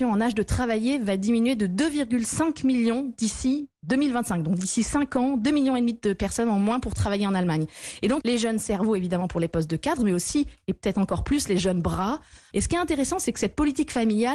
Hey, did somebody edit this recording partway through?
yes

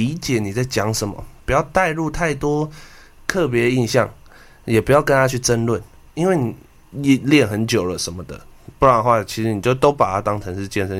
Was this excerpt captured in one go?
no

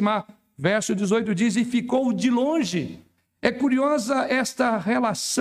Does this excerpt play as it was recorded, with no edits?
yes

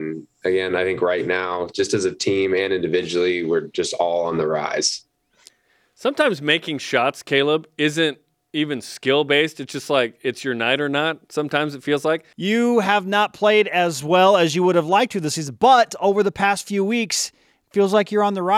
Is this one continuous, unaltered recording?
no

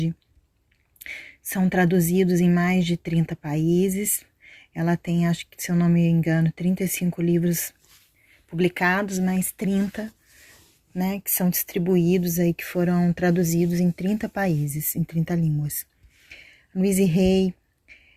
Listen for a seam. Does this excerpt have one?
no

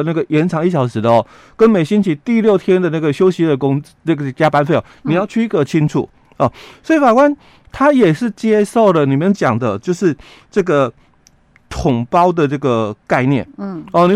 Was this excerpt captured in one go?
yes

